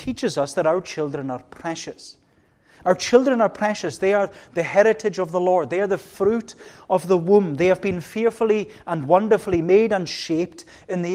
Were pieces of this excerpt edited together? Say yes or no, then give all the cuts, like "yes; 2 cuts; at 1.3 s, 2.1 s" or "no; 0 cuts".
no; 0 cuts